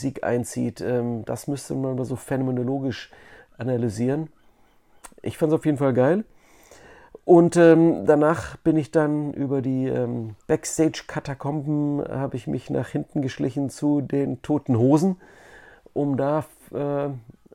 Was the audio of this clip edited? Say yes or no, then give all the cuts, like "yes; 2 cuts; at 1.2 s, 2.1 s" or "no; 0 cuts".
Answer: yes; 1 cut; at 10.4 s